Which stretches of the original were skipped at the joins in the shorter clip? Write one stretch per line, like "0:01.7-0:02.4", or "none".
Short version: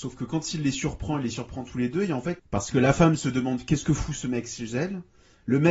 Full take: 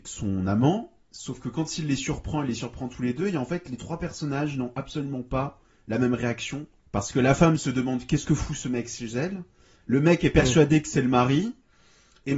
0:03.6-0:06.8